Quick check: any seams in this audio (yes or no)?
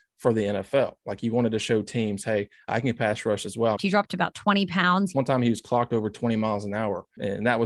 yes